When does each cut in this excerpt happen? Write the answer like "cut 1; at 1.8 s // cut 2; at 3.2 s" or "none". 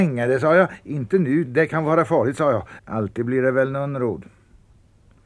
cut 1; at 1.5 s // cut 2; at 2.8 s